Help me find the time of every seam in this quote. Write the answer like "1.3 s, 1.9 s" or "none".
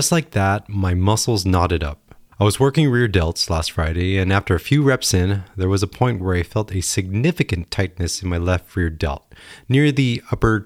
2.3 s